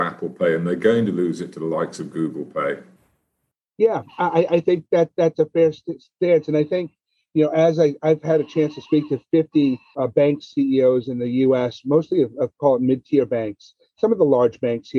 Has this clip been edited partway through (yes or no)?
no